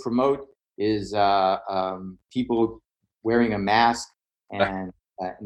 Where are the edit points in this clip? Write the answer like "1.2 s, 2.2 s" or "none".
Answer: none